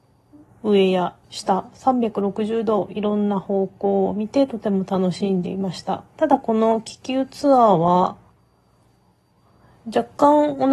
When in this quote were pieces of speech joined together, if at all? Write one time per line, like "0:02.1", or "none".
0:01.2
0:06.1